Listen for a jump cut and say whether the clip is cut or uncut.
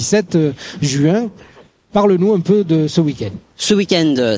uncut